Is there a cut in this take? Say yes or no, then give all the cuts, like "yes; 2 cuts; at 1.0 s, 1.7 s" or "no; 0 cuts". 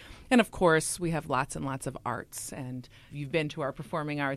yes; 1 cut; at 3.1 s